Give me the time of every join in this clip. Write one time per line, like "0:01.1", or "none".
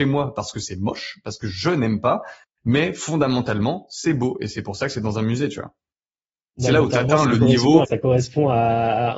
0:07.8